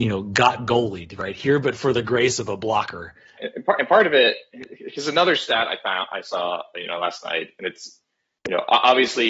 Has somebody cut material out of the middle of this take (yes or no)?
yes